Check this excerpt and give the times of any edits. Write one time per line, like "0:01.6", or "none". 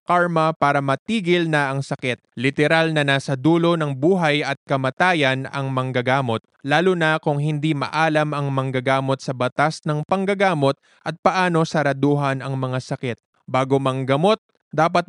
0:02.3